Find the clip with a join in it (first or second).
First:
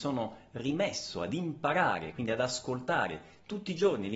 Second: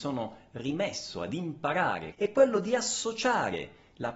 second